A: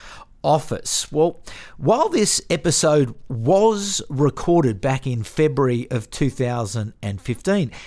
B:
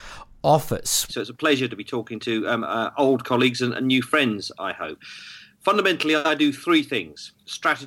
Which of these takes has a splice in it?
B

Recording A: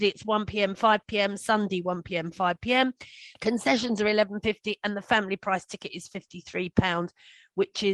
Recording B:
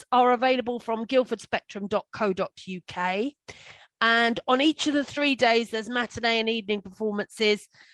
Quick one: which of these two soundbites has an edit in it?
A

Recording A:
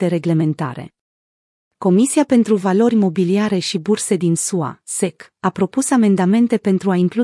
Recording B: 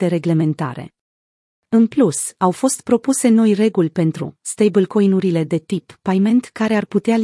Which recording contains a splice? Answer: B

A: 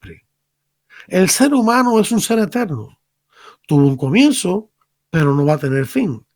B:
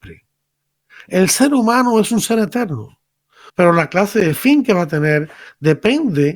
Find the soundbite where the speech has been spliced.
B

